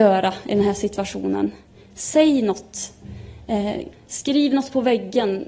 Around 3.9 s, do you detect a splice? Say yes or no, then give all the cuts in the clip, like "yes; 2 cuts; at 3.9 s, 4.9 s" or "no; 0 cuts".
yes; 1 cut; at 3.9 s